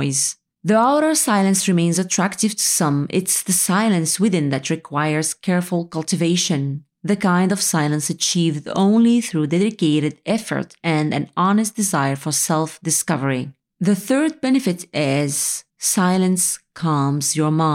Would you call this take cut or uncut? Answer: uncut